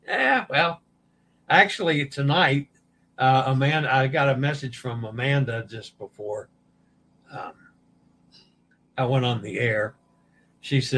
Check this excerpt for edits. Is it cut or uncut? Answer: uncut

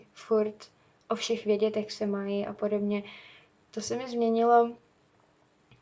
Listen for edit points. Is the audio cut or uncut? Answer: cut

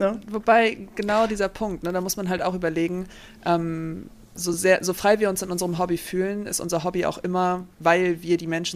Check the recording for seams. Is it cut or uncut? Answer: uncut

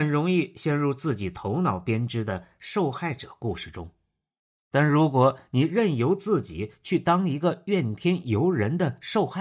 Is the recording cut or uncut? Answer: uncut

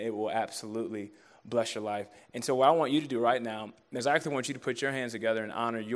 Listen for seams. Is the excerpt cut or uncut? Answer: uncut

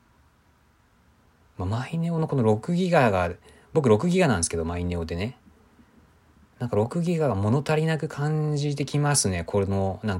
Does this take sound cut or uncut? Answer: uncut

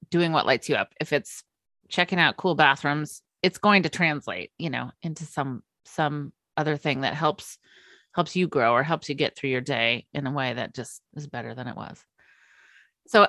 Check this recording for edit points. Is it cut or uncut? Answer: uncut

